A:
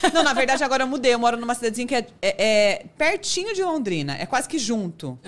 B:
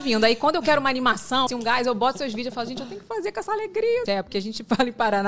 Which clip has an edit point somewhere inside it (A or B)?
B